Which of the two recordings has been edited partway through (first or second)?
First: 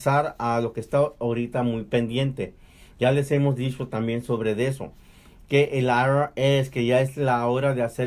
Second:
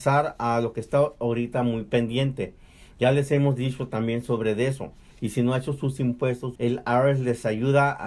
second